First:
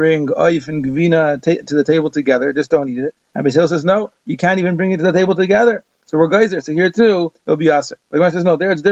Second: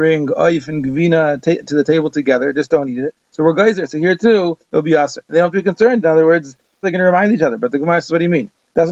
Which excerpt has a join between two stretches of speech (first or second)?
second